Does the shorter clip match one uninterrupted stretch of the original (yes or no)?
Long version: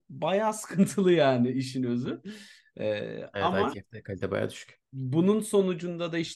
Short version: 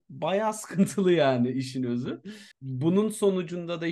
no